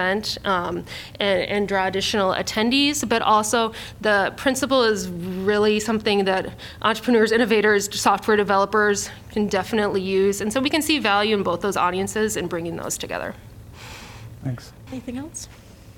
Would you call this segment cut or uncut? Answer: cut